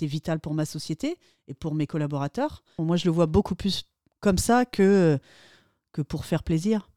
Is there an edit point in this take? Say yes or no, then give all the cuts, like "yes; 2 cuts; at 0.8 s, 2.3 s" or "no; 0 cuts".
yes; 1 cut; at 2.8 s